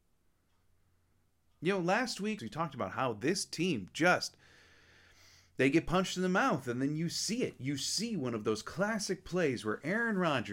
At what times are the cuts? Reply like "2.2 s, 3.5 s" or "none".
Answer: 2.4 s